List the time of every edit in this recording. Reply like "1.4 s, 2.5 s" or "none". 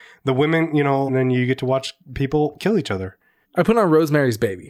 1.1 s, 3.4 s